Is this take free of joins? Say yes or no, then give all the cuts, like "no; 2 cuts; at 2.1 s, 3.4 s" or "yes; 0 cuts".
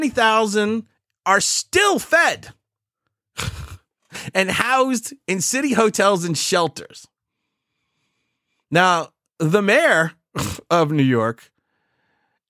yes; 0 cuts